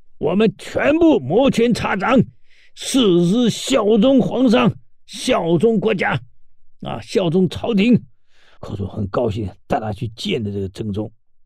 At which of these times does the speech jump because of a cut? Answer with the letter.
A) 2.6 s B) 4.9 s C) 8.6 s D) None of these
C